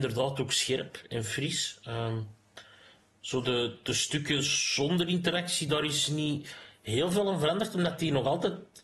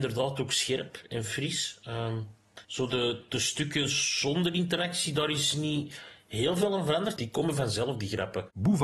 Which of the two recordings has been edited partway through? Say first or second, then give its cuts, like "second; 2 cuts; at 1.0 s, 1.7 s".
second; 2 cuts; at 2.6 s, 7.2 s